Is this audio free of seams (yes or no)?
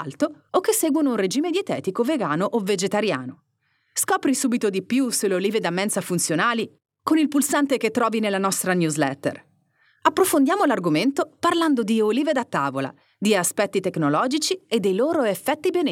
yes